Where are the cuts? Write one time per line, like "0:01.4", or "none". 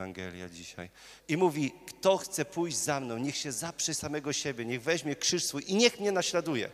0:01.2